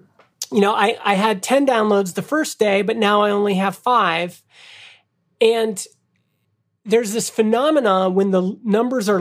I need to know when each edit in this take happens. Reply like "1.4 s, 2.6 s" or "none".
none

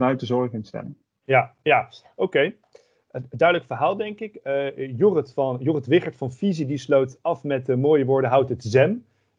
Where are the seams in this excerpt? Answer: none

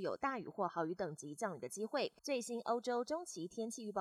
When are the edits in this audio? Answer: 2.2 s

